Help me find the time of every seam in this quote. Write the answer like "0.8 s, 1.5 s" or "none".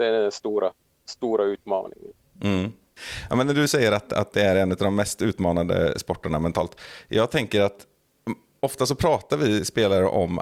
none